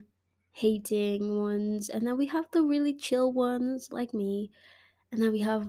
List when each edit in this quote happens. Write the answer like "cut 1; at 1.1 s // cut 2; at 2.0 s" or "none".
none